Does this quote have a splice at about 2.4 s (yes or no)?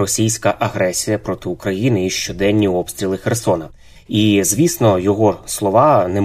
no